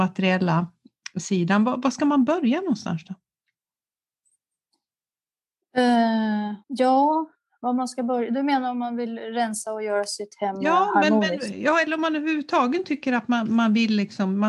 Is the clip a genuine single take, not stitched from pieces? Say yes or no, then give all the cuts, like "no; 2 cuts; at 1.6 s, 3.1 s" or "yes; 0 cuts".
no; 1 cut; at 6.6 s